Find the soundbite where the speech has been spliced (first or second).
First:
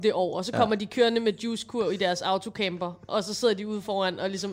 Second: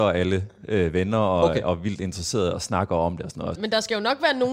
second